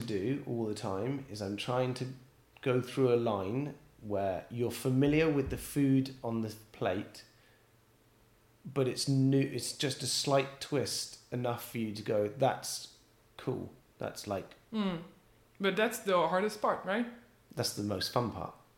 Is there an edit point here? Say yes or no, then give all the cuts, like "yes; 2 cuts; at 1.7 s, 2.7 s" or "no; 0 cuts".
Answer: no; 0 cuts